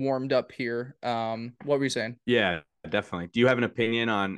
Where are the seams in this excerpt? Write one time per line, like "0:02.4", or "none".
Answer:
none